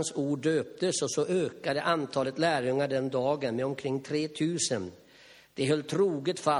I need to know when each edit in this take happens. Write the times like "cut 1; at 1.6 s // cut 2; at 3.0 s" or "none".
none